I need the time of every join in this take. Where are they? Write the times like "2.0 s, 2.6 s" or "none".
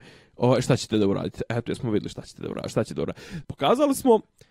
3.4 s

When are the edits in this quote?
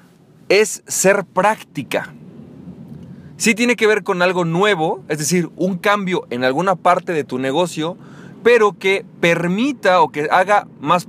none

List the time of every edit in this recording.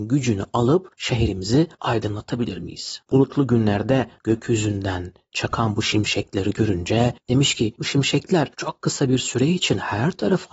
3.0 s

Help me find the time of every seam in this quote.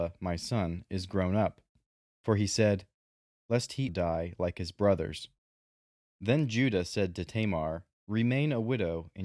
3.9 s, 6.1 s, 8.0 s

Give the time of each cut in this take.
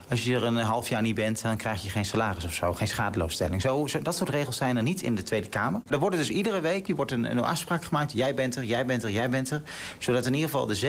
5.9 s, 6.9 s

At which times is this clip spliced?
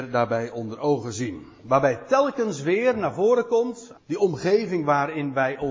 3.9 s

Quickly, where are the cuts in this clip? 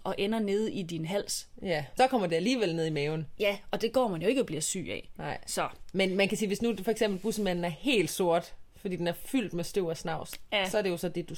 2.0 s

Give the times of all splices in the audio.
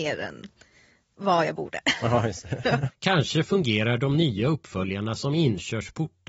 2.9 s

